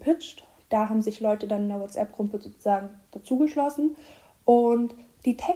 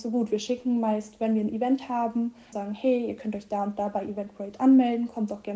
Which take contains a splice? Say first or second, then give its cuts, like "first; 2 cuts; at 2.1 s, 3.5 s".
second; 1 cut; at 2.5 s